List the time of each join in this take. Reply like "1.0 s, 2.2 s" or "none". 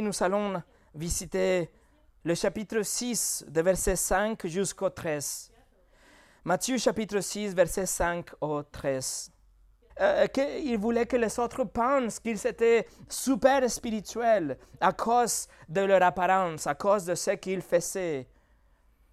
9.9 s

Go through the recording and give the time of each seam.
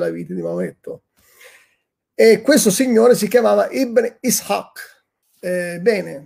5.2 s

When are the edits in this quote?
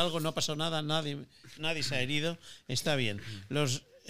1.5 s

